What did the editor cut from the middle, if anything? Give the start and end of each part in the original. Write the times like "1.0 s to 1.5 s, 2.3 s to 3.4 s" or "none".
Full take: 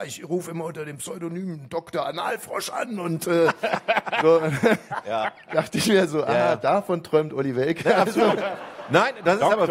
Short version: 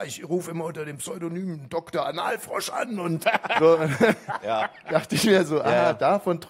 3.2 s to 3.8 s